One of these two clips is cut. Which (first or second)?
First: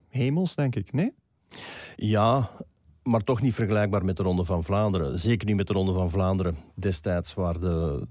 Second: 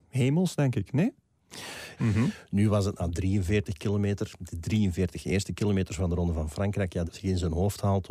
second